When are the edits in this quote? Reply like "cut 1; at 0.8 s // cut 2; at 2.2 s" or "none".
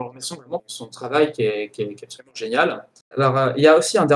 cut 1; at 3.1 s